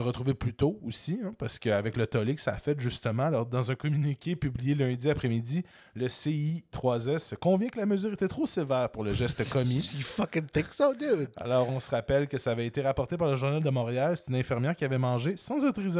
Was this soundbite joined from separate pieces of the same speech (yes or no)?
no